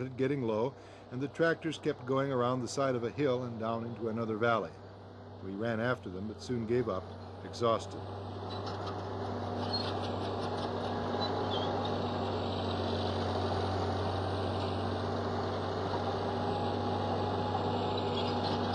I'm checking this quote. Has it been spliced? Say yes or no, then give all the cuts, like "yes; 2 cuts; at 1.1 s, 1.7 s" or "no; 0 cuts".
no; 0 cuts